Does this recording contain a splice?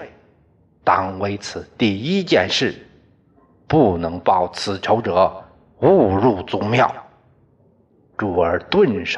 no; 0 cuts

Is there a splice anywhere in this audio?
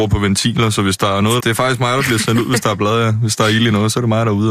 yes; 1 cut; at 1.4 s

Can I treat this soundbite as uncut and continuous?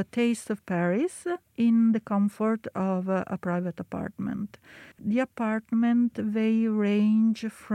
no; 1 cut; at 4.9 s

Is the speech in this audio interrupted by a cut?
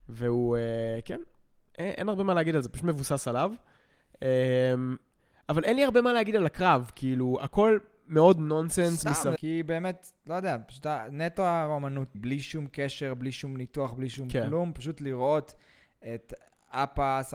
yes; 2 cuts; at 9.4 s, 12.1 s

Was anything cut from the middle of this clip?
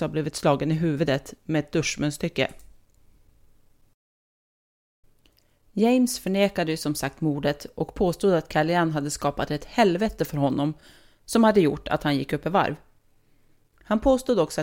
no; 0 cuts

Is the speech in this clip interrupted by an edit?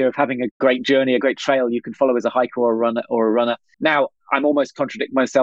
yes; 1 cut; at 3.7 s

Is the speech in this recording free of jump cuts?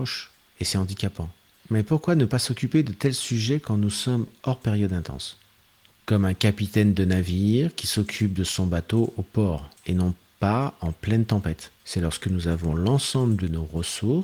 no; 3 cuts; at 1.6 s, 9.8 s, 11.8 s

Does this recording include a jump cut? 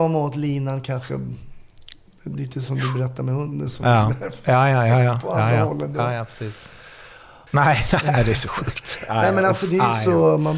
yes; 1 cut; at 7.5 s

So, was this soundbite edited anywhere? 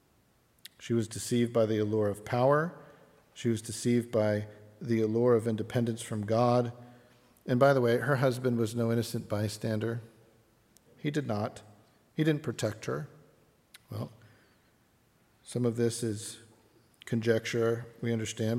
yes; 2 cuts; at 10.9 s, 13.7 s

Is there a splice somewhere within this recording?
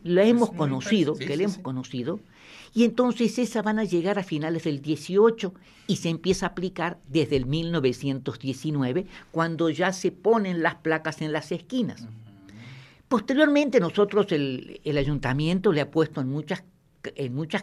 no; 0 cuts

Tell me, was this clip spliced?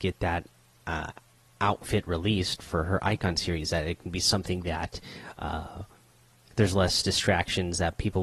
no; 0 cuts

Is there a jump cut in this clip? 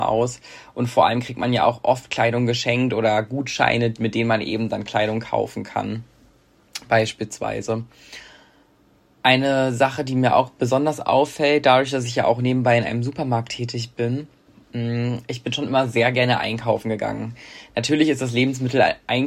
no; 0 cuts

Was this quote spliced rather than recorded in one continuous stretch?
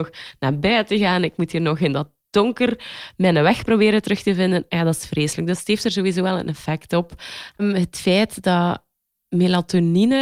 yes; 1 cut; at 7.6 s

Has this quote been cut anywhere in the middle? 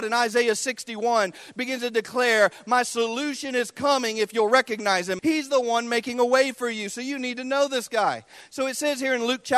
yes; 1 cut; at 5.2 s

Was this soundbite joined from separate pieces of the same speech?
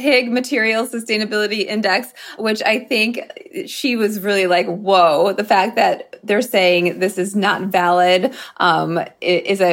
yes; 1 cut; at 2.4 s

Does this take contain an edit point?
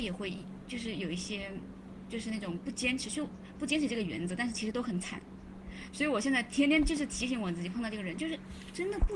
no; 0 cuts

